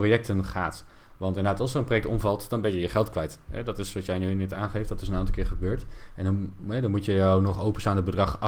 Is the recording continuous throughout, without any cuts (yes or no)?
yes